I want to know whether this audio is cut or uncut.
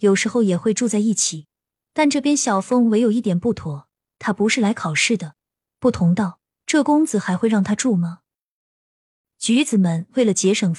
cut